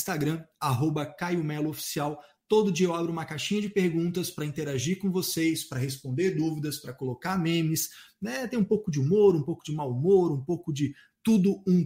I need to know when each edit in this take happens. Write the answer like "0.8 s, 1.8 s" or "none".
none